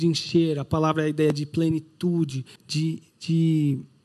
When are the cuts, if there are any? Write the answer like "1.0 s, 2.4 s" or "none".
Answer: 2.6 s